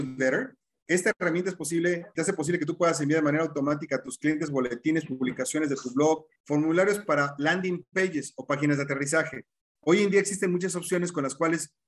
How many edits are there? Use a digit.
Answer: 3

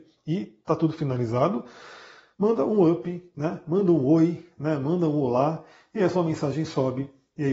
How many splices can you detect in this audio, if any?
1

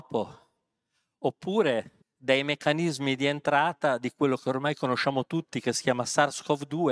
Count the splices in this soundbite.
1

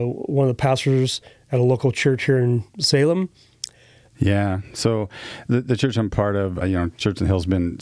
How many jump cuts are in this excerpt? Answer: 2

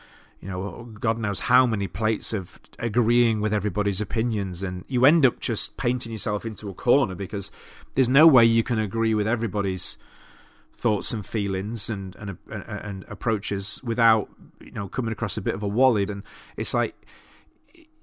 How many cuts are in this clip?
1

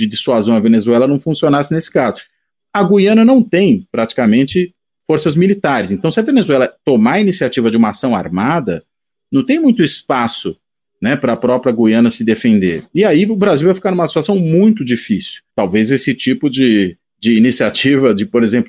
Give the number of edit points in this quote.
1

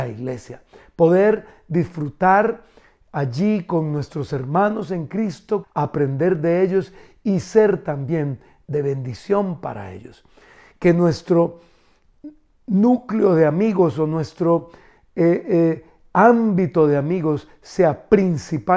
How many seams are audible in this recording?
1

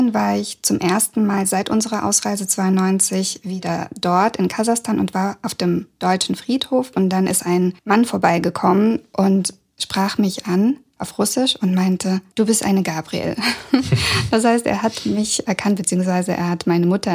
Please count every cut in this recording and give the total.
0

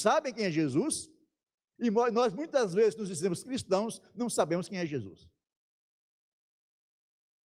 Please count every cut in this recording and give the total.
0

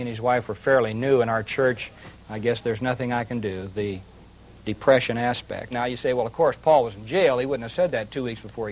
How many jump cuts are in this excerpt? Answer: 2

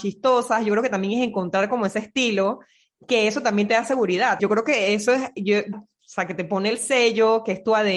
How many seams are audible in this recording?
2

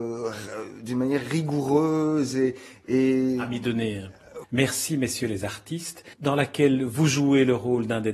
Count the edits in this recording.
2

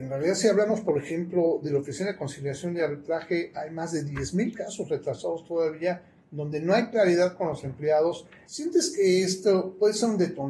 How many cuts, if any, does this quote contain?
1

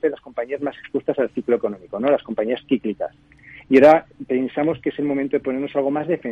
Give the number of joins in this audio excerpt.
0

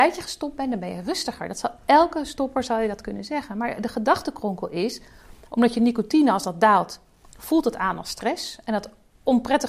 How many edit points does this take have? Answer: 0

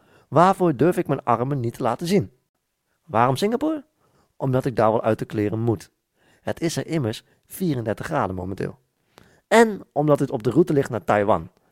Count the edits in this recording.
0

